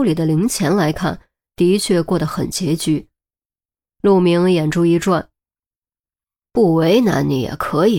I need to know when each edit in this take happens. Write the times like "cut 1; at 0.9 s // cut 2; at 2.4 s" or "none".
none